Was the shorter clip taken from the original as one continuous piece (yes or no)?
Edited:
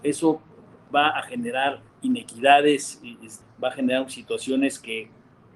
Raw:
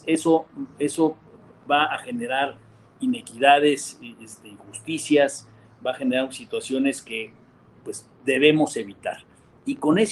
no